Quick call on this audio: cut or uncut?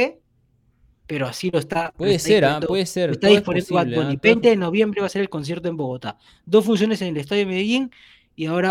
uncut